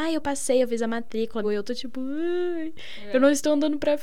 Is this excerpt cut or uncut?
cut